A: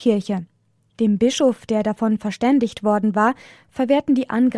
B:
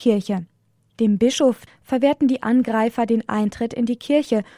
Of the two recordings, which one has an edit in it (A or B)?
B